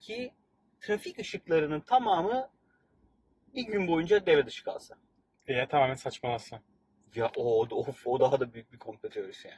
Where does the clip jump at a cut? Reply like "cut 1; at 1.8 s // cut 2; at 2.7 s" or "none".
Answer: none